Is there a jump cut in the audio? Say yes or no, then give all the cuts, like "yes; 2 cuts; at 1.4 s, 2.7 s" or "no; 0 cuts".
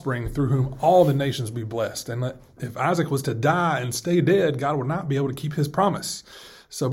no; 0 cuts